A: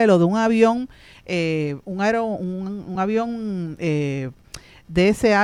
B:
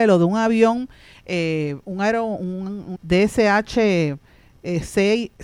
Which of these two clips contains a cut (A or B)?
B